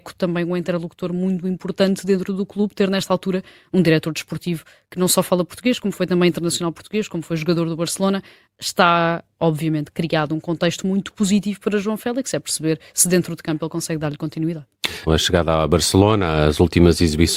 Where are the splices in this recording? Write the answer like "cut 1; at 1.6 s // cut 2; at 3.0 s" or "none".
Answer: cut 1; at 15.1 s